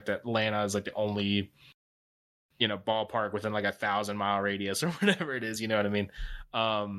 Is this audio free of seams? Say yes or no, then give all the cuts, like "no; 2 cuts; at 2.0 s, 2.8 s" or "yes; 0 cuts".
yes; 0 cuts